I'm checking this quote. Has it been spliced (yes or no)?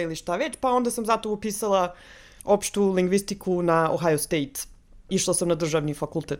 no